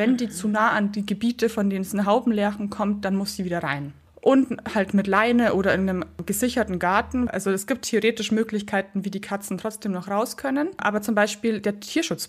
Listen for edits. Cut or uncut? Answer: uncut